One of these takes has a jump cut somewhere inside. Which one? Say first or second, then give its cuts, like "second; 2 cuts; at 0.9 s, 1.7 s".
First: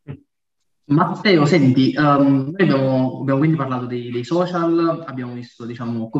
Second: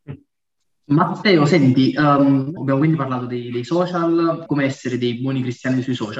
second; 2 cuts; at 2.6 s, 4.5 s